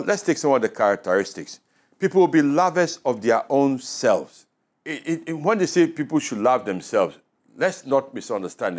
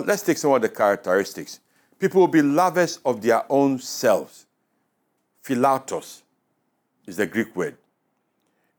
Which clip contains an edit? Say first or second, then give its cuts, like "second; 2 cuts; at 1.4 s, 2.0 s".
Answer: first; 1 cut; at 4.7 s